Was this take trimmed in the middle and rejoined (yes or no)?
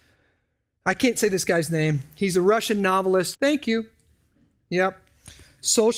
yes